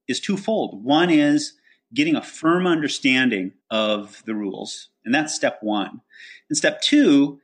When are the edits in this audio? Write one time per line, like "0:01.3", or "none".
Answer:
0:03.6